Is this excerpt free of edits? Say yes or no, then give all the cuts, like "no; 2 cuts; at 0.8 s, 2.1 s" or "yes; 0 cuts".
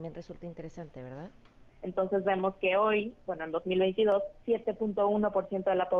no; 1 cut; at 1.7 s